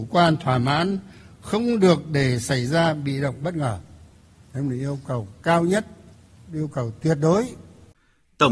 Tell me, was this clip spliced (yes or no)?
no